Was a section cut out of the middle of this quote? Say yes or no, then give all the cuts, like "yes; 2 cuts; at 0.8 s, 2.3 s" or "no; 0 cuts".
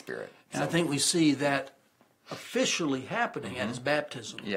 no; 0 cuts